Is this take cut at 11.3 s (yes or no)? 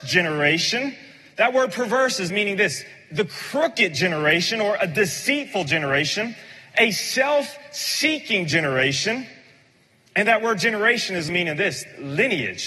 yes